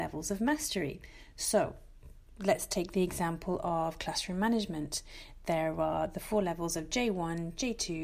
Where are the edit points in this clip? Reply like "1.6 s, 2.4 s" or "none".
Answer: none